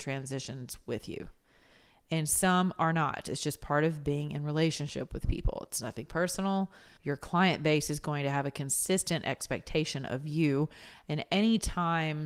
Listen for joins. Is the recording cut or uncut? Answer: cut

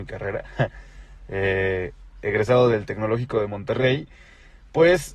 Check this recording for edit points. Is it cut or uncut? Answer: uncut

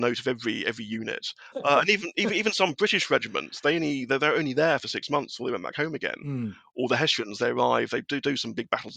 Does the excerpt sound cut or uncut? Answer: cut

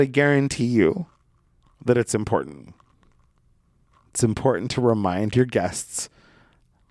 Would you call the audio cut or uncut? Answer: uncut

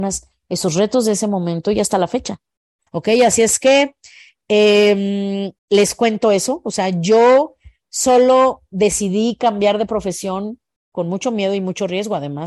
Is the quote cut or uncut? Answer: cut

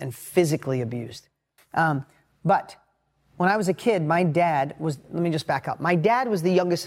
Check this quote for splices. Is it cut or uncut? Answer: cut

